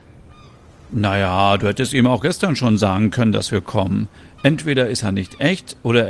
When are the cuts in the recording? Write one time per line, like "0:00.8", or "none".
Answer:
none